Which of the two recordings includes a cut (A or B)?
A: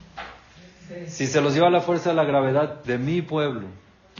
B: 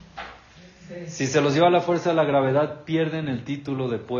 A